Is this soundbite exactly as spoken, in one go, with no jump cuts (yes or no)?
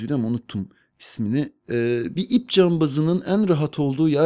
yes